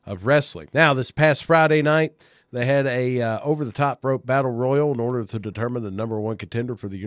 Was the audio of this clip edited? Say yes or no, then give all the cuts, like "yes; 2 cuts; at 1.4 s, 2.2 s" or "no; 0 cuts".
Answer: no; 0 cuts